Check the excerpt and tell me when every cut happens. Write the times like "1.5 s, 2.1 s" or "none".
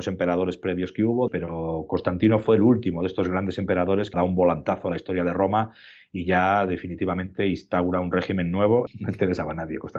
1.3 s, 4.1 s, 8.9 s

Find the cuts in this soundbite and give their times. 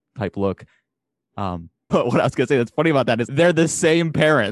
1.9 s, 3.3 s

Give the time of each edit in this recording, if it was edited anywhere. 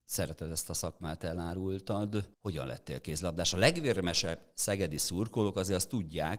2.3 s

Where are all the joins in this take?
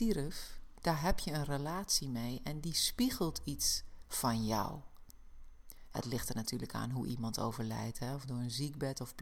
5.9 s

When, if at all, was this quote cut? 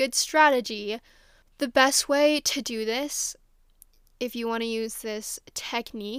none

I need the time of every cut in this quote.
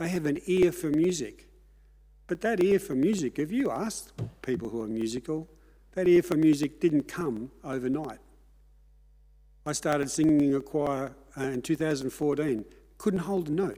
none

